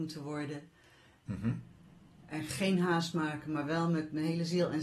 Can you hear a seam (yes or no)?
yes